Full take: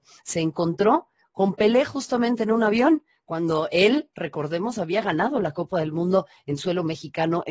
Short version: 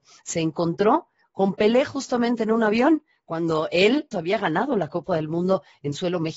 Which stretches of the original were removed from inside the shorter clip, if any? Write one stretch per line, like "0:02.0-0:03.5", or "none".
0:04.1-0:04.7